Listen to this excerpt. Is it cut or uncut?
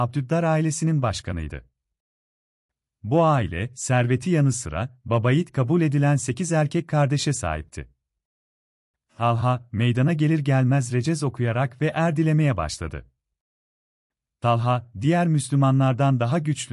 uncut